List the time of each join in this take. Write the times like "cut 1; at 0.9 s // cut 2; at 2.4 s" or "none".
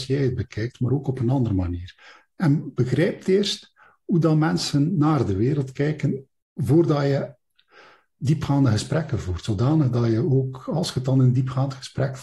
none